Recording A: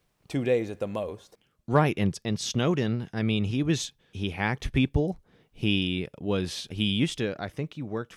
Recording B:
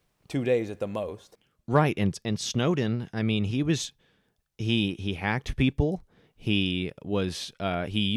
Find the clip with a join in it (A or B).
A